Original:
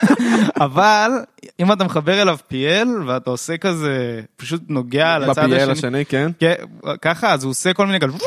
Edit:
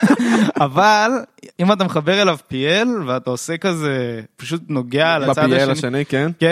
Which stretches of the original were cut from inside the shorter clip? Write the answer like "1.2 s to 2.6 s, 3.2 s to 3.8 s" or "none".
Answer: none